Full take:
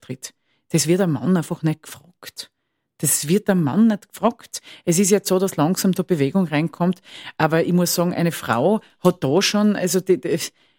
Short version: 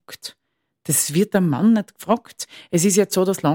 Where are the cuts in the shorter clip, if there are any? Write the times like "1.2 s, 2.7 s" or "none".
none